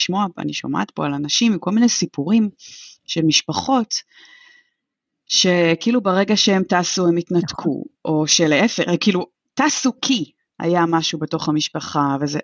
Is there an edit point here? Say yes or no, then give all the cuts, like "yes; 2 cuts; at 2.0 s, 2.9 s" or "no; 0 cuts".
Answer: no; 0 cuts